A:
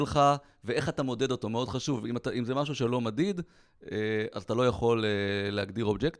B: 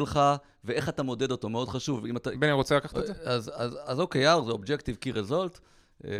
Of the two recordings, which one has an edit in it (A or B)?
B